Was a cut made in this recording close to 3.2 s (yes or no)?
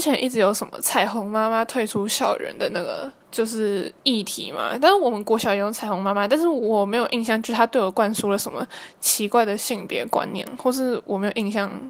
yes